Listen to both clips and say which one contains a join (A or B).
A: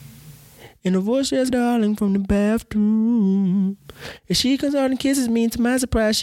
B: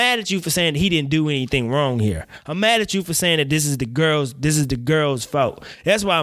A